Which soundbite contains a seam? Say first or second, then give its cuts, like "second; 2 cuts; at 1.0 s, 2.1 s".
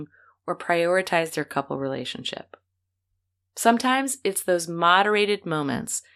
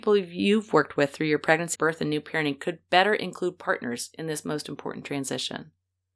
second; 1 cut; at 1.7 s